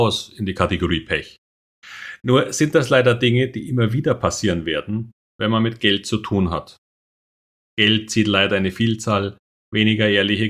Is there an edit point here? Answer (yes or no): no